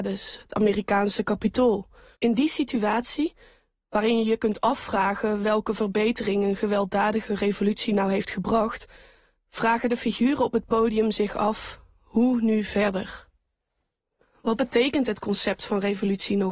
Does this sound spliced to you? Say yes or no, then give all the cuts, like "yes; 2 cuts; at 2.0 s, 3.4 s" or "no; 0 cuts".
yes; 1 cut; at 2.1 s